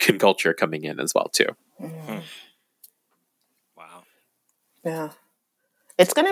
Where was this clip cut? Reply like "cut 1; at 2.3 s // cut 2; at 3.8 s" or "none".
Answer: none